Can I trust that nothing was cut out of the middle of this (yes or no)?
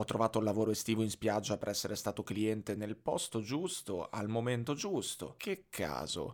yes